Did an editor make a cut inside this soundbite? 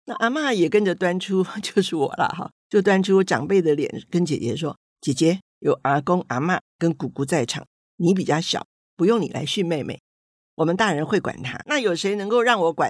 yes; 1 cut; at 11.7 s

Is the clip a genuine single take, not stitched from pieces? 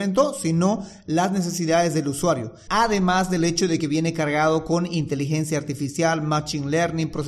no; 1 cut; at 2.7 s

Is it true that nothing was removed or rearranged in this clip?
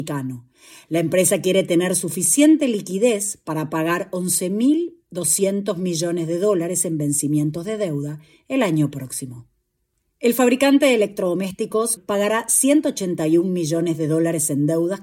no; 1 cut; at 12.0 s

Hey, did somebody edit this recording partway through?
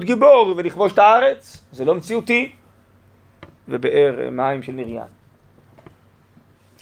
yes; 1 cut; at 3.6 s

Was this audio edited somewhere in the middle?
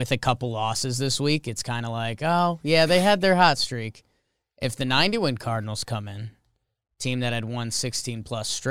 no; 0 cuts

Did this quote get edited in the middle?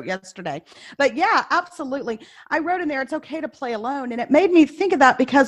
no; 0 cuts

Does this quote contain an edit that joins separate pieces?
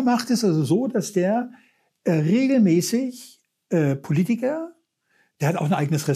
no; 0 cuts

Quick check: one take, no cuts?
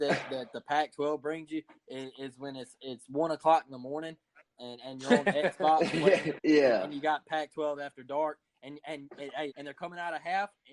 no; 2 cuts; at 6.4 s, 9.5 s

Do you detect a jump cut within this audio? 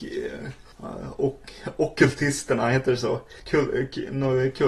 no; 0 cuts

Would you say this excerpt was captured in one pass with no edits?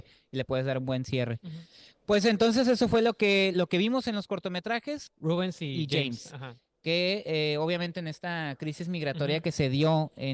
no; 1 cut; at 5.1 s

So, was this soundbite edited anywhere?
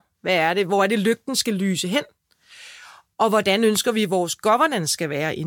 no; 0 cuts

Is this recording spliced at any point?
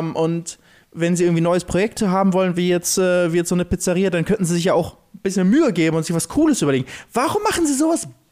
no; 0 cuts

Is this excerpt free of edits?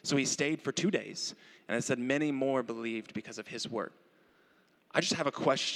yes; 0 cuts

